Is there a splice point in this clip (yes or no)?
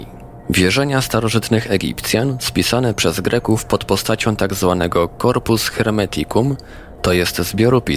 no